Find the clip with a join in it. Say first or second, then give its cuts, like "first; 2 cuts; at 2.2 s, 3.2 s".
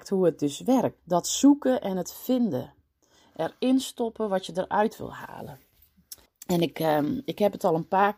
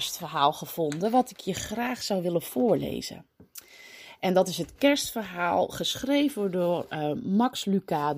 first; 2 cuts; at 1.0 s, 6.3 s